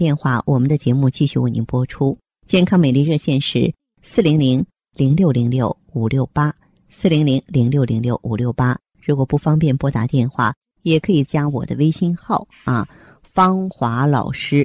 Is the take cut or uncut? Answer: cut